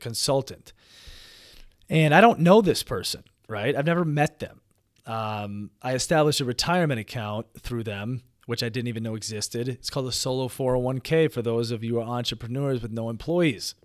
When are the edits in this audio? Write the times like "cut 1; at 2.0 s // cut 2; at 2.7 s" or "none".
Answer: none